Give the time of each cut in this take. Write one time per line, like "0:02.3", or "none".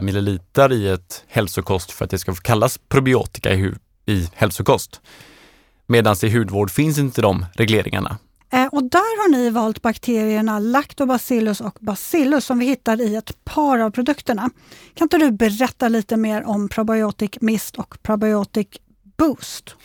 0:08.4